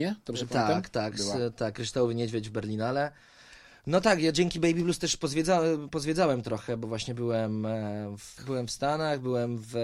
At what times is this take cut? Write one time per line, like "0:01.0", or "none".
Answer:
0:08.4